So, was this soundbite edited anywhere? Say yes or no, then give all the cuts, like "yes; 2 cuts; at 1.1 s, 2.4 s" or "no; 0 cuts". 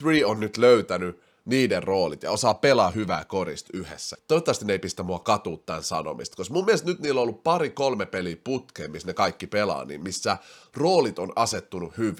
yes; 1 cut; at 4.1 s